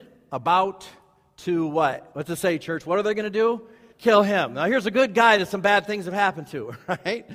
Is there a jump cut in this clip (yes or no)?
yes